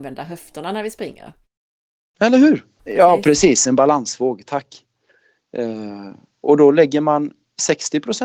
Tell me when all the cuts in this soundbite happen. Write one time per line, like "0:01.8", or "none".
0:02.8